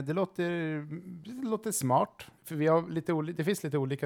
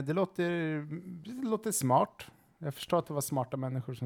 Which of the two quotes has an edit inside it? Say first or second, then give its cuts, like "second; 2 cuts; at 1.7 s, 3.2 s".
first; 1 cut; at 2.4 s